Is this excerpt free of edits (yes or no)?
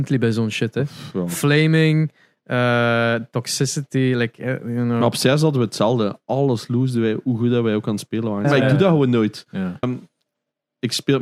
no